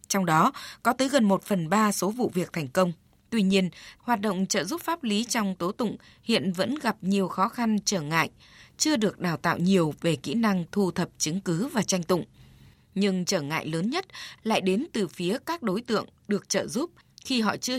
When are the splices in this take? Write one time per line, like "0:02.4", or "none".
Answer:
0:04.0
0:08.7